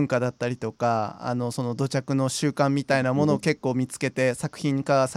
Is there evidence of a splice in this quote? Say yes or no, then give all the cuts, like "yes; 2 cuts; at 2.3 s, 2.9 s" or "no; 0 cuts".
no; 0 cuts